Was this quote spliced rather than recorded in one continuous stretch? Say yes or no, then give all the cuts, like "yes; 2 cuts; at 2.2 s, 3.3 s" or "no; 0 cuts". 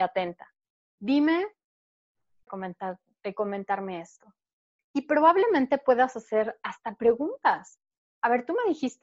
yes; 2 cuts; at 2.5 s, 4.8 s